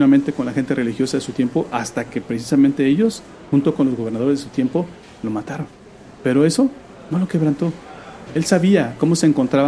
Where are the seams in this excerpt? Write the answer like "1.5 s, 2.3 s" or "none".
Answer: 8.3 s